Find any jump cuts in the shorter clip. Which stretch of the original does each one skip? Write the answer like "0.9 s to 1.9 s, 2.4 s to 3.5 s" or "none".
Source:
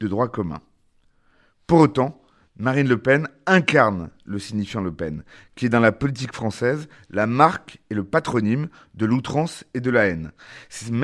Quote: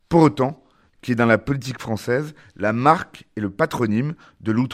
2.5 s to 5.5 s